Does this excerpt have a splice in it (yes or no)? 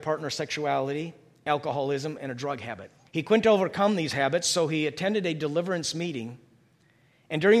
yes